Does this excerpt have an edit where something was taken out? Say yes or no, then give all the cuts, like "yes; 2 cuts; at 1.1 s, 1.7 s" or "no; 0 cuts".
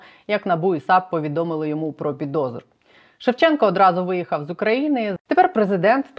yes; 1 cut; at 5.2 s